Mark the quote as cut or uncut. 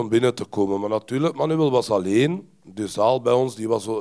uncut